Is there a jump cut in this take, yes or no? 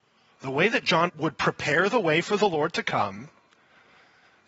yes